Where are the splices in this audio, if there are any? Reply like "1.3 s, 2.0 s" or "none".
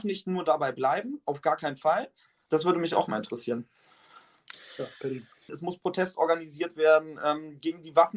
2.5 s, 5.5 s